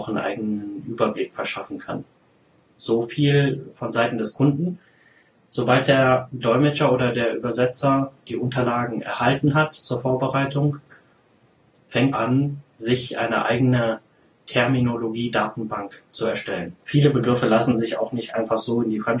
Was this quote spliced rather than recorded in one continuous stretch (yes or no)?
yes